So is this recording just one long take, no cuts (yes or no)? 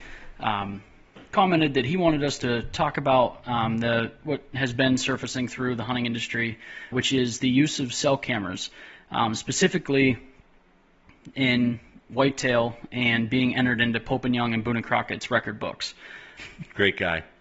no